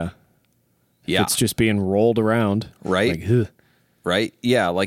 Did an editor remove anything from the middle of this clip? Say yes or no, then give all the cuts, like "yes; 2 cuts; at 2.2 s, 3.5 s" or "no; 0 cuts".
no; 0 cuts